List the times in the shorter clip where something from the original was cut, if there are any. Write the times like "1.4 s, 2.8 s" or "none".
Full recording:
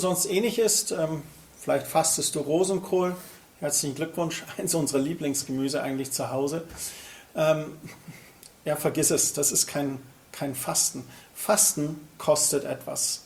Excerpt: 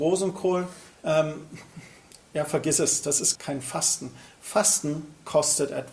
0.9 s, 3.4 s

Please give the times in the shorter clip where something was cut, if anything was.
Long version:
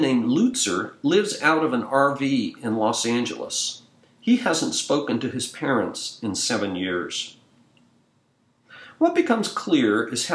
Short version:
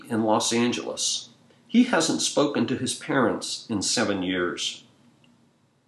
none

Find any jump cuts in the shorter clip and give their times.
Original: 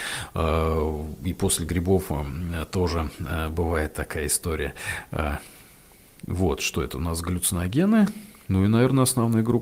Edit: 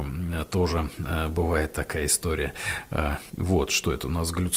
3.3 s

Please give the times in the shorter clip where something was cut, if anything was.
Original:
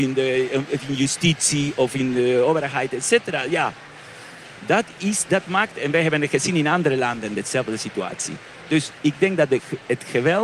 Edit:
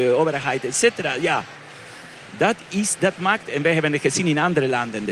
none

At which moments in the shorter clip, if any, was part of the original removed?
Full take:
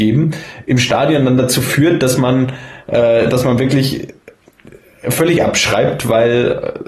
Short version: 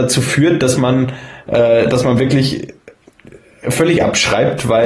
none

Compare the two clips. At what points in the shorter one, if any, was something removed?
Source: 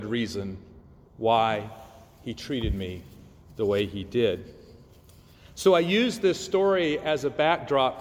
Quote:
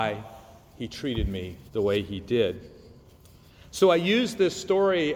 1.7 s

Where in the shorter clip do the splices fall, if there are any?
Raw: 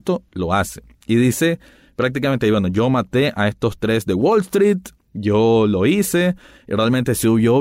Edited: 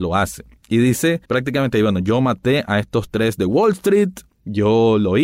1.2 s

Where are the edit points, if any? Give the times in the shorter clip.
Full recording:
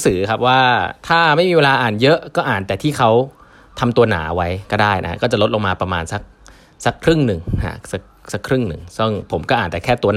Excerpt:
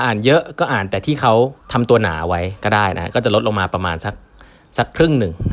1.6 s

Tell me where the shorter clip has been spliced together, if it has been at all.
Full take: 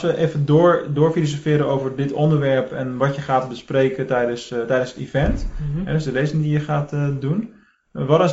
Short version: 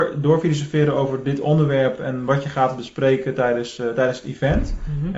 none

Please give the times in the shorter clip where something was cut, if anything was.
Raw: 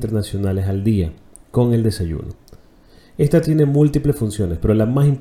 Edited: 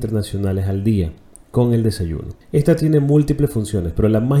2.4 s

